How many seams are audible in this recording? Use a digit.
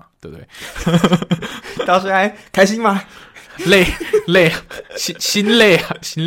1